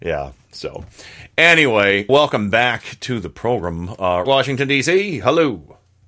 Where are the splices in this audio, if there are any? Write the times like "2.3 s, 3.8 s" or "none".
2.1 s, 4.3 s